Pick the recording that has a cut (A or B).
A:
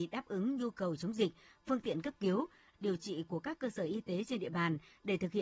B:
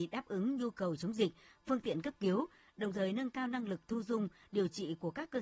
A